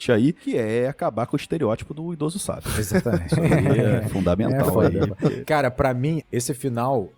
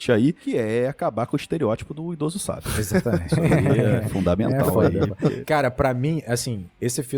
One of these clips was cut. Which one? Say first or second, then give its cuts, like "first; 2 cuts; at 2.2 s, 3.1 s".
first; 1 cut; at 6.2 s